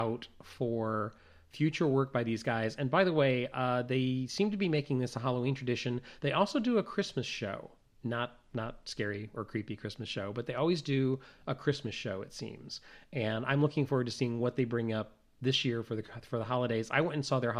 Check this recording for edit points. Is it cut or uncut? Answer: uncut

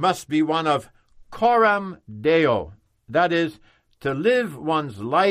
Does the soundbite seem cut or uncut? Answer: uncut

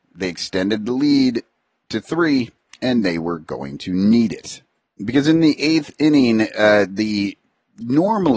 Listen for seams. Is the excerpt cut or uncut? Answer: uncut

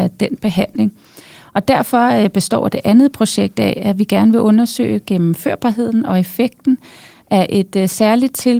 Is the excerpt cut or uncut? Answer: uncut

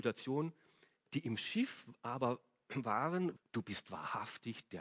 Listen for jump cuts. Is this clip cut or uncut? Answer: cut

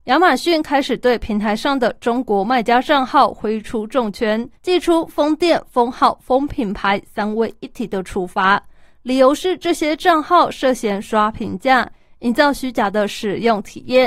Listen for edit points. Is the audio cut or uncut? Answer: cut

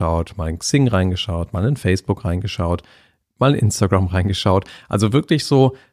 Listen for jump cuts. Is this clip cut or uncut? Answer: uncut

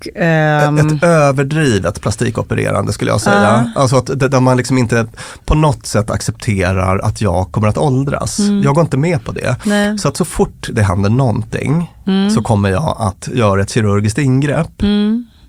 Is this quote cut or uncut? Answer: uncut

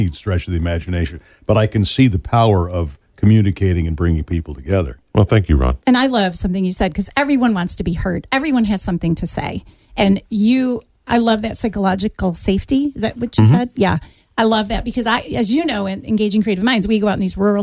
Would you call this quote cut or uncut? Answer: uncut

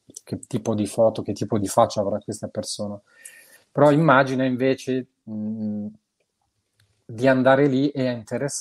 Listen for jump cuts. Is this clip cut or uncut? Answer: uncut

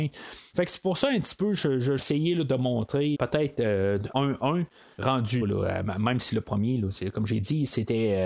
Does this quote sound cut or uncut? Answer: cut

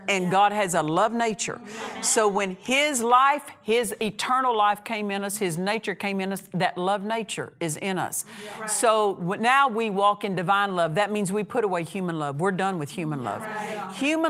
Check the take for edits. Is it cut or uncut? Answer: uncut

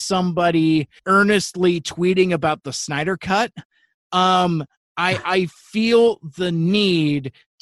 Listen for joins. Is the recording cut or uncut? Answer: cut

